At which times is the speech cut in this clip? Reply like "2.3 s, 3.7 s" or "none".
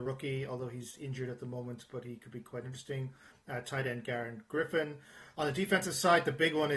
none